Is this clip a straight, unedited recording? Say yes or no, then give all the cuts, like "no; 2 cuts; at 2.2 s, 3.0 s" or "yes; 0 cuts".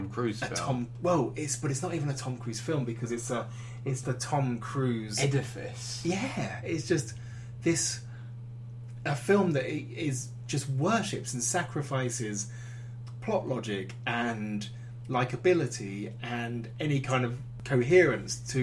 no; 1 cut; at 4.0 s